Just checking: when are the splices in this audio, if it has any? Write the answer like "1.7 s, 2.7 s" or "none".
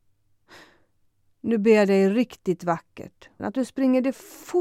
3.4 s